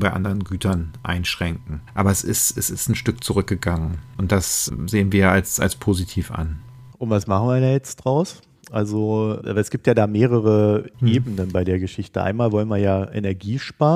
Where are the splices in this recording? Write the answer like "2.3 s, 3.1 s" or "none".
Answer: 1.9 s

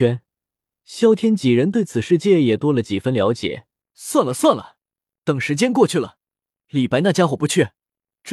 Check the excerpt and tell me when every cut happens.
3.8 s

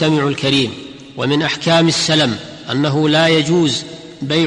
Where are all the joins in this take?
none

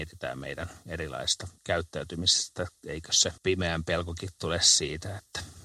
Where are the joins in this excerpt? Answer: 1.6 s, 3.4 s

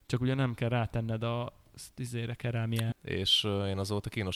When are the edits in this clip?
2.9 s

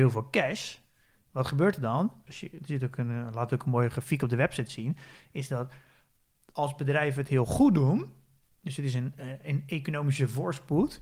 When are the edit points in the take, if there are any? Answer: 2.3 s

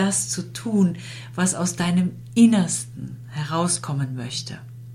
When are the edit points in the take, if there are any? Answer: none

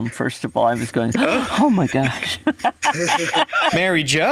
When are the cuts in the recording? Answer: none

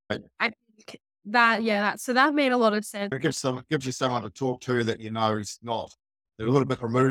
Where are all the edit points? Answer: 3.1 s

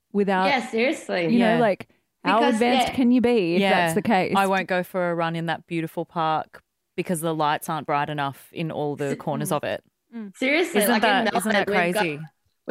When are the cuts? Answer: none

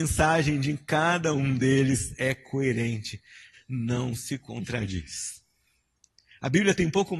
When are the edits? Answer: 3.5 s

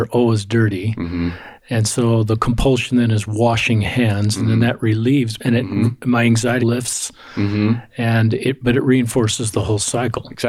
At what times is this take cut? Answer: 5.4 s, 6.6 s

